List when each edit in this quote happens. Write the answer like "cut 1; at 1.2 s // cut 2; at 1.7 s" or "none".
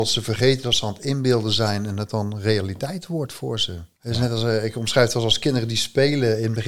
cut 1; at 3.9 s